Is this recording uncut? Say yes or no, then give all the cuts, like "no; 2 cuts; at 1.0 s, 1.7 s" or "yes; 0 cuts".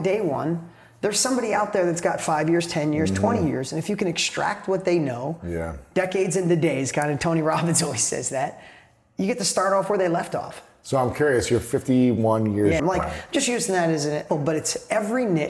no; 2 cuts; at 12.8 s, 14.3 s